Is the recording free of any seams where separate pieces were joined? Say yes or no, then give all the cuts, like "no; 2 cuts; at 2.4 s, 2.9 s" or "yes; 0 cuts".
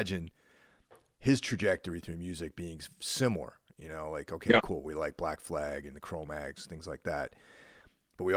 yes; 0 cuts